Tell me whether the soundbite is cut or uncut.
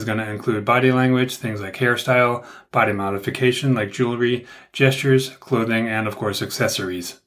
uncut